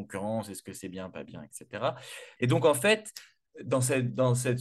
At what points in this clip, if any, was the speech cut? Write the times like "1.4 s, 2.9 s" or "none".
2.4 s